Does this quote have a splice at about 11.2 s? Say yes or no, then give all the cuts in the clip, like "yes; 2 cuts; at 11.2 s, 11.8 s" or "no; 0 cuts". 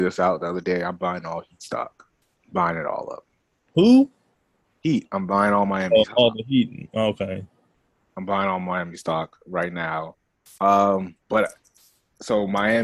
yes; 1 cut; at 11.2 s